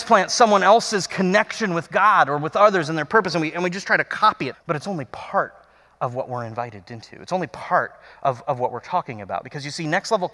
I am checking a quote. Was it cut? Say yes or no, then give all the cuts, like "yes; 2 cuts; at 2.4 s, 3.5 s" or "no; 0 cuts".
yes; 1 cut; at 4.5 s